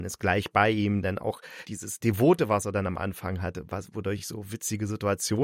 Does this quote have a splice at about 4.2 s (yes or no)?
no